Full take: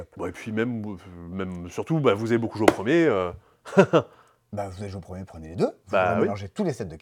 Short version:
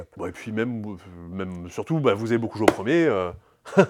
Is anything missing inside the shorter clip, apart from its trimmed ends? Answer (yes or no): no